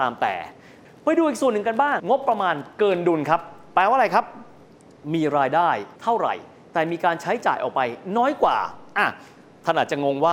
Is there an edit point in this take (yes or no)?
yes